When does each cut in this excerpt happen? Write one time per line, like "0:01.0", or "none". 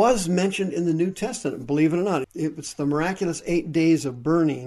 0:02.2